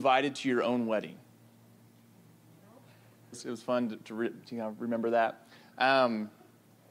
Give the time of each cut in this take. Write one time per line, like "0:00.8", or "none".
0:03.3